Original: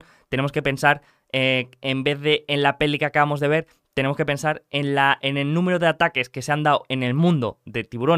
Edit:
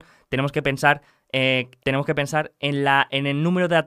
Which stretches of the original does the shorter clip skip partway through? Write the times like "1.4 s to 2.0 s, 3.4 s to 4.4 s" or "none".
1.8 s to 3.9 s